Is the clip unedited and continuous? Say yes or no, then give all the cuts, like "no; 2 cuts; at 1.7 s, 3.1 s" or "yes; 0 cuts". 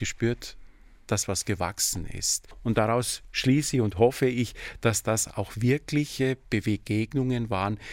yes; 0 cuts